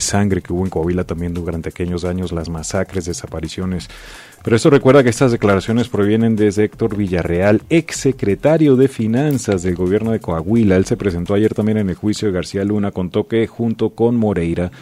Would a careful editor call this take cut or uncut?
cut